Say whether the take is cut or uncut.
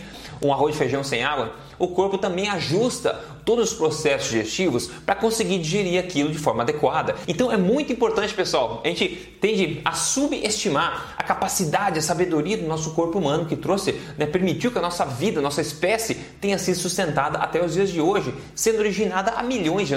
uncut